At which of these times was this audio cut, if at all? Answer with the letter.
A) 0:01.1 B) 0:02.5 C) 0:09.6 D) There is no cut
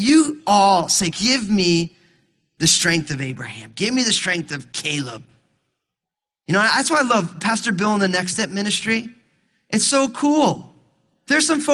A